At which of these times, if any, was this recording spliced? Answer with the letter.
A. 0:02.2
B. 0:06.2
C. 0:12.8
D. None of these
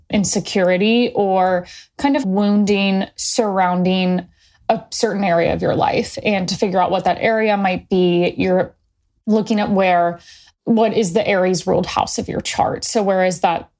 A